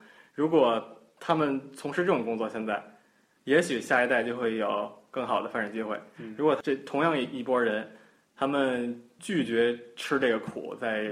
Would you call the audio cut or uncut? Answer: uncut